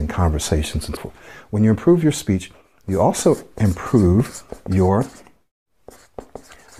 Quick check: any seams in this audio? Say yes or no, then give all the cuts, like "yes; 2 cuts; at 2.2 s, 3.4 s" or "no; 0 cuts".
yes; 1 cut; at 1.0 s